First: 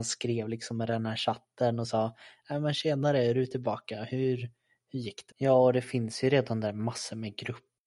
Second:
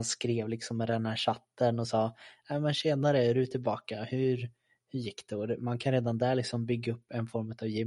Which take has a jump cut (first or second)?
first